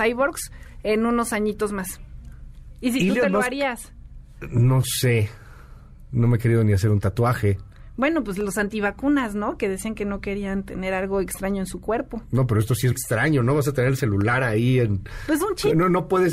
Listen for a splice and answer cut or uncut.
cut